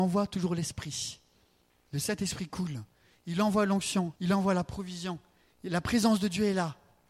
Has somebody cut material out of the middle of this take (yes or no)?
yes